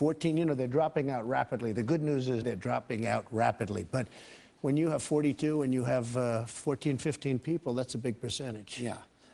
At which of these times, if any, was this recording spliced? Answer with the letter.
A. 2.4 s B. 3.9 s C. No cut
A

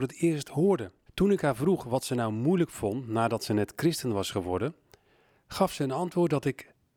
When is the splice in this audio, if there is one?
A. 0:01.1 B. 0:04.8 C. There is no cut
A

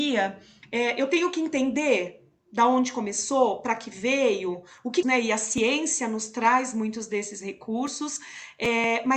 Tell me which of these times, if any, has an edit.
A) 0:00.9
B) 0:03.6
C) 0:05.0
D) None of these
C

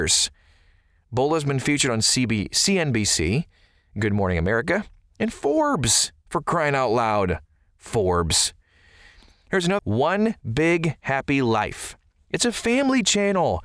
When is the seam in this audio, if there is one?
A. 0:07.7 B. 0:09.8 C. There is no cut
B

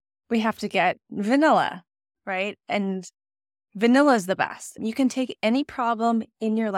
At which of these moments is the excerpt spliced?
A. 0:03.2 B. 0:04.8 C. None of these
B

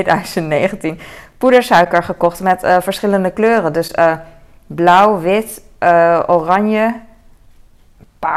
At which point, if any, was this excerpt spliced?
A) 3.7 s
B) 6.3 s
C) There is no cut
C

